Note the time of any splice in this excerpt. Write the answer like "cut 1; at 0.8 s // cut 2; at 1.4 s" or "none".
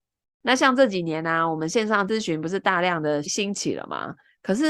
cut 1; at 3.2 s